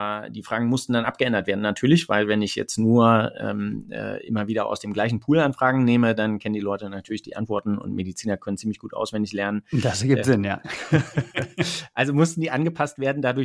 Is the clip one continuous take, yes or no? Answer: yes